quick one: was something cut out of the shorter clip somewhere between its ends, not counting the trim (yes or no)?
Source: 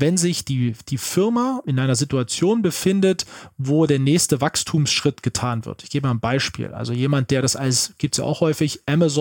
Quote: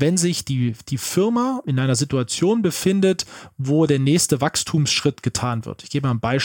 no